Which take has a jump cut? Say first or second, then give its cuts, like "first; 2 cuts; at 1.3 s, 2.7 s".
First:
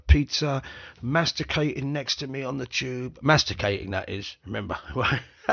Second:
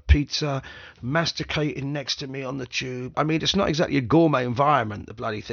second; 1 cut; at 3.1 s